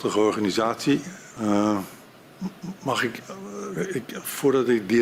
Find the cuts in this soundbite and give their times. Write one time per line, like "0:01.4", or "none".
0:01.4